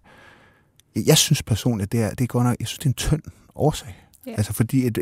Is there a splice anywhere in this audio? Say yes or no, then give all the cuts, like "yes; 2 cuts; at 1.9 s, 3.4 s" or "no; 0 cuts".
yes; 1 cut; at 2.2 s